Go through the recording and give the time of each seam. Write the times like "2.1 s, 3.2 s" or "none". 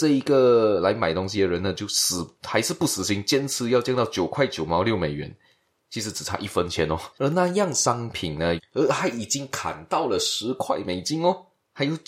7.1 s, 8.6 s

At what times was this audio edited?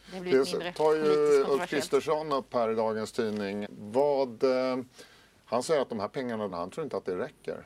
3.6 s, 6.5 s

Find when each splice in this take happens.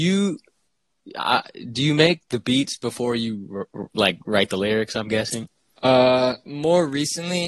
6.5 s

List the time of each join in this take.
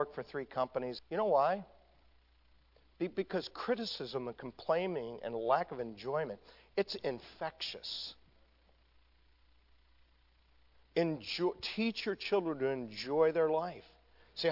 1.0 s

